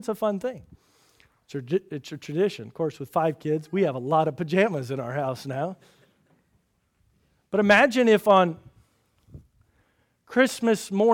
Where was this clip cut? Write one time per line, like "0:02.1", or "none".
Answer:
none